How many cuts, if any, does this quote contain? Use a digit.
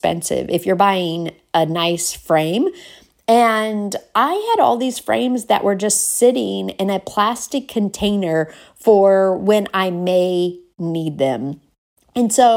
0